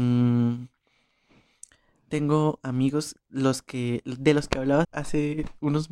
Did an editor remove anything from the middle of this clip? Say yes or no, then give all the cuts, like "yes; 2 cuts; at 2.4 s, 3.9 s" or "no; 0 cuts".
yes; 1 cut; at 4.8 s